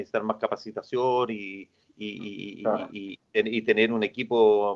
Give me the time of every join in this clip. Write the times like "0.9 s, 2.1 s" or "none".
none